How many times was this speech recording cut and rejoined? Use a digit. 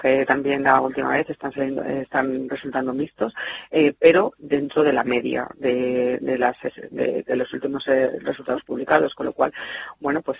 1